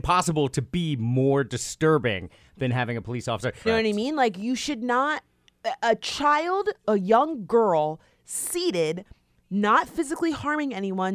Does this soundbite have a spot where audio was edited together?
yes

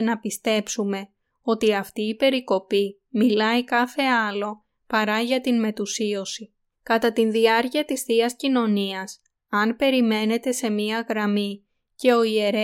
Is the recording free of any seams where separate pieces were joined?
no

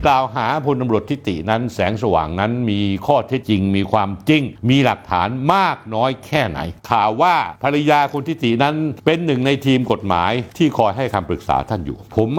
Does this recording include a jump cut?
yes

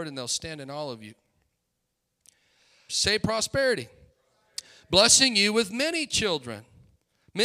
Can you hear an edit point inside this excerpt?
yes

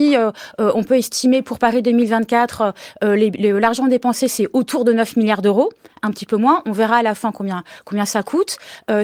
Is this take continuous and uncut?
yes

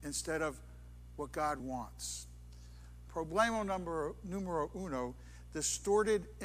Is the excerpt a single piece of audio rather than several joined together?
no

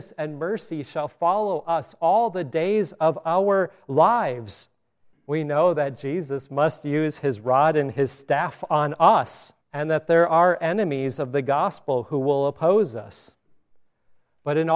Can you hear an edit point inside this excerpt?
yes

